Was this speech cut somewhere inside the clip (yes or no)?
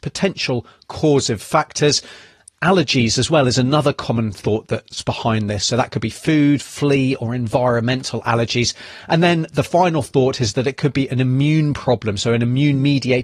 no